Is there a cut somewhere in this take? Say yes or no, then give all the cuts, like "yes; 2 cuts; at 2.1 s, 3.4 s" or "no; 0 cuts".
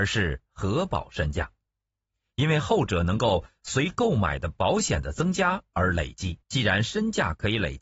yes; 1 cut; at 6.4 s